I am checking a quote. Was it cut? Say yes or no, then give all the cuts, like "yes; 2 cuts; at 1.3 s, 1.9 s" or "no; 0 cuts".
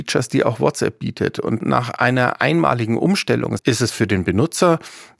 yes; 1 cut; at 3.6 s